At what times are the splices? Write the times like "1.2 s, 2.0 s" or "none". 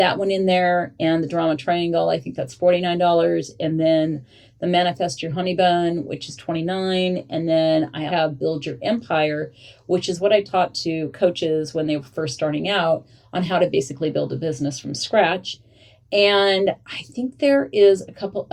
8.1 s